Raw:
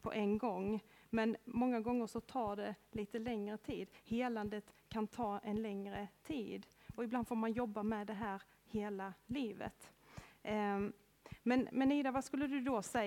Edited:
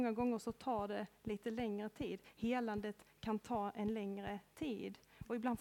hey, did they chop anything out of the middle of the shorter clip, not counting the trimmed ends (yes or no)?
no